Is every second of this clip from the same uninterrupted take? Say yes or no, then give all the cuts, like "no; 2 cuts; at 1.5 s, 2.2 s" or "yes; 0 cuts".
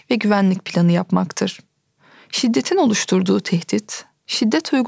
yes; 0 cuts